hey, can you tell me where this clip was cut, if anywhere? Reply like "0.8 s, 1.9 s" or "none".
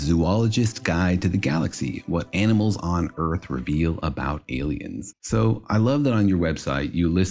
5.1 s